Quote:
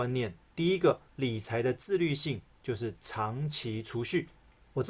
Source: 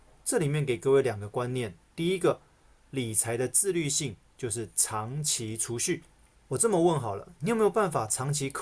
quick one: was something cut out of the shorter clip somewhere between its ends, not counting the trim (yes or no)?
yes